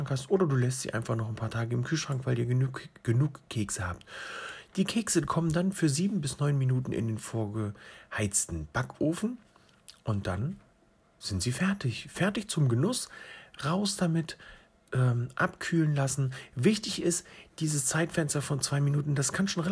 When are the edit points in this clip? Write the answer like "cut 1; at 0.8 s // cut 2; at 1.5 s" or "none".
cut 1; at 17.5 s